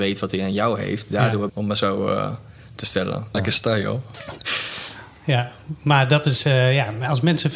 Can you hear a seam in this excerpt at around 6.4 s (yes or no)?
no